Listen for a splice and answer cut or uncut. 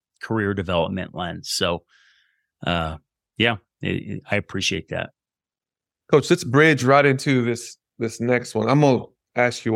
uncut